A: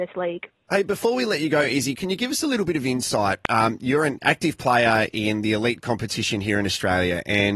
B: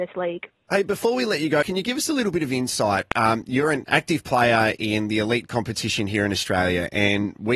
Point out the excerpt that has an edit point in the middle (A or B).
B